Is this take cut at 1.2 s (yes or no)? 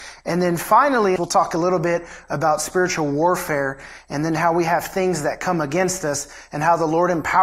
yes